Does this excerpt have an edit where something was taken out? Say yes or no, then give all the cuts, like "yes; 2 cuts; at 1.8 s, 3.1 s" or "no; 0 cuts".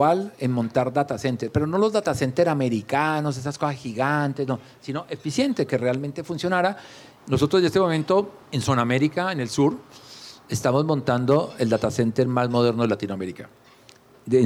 yes; 2 cuts; at 7.2 s, 8.4 s